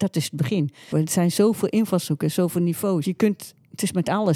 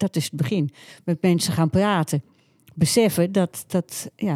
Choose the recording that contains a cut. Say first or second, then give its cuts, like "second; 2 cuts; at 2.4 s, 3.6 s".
first; 2 cuts; at 0.9 s, 3.0 s